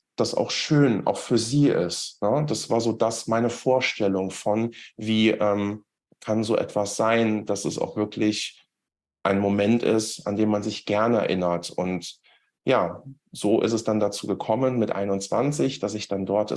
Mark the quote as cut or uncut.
uncut